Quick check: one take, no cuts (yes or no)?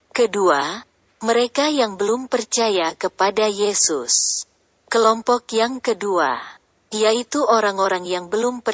yes